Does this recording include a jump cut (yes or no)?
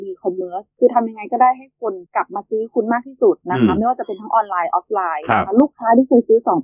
yes